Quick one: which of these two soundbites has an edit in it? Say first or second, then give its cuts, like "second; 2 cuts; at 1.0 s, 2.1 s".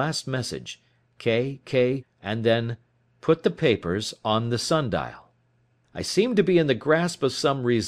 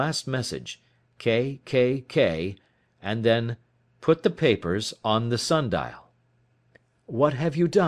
first; 2 cuts; at 2.0 s, 5.8 s